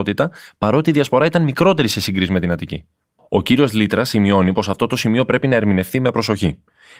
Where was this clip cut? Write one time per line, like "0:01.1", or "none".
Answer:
0:03.2